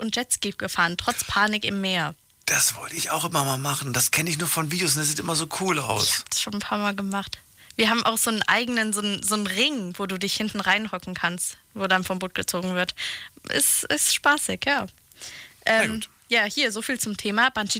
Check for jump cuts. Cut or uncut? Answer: uncut